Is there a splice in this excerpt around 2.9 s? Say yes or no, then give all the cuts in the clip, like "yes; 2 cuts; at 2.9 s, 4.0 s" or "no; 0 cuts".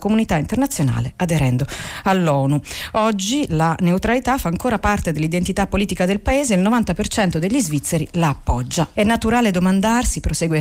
no; 1 cut; at 8.9 s